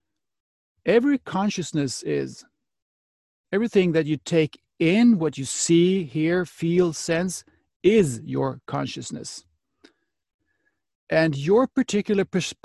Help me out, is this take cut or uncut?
uncut